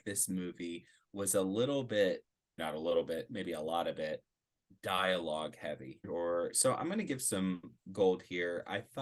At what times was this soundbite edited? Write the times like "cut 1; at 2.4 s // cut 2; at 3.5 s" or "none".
cut 1; at 2.6 s // cut 2; at 6.0 s